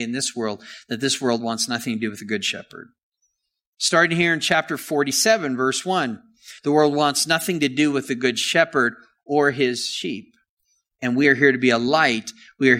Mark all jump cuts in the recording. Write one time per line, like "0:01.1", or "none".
0:06.6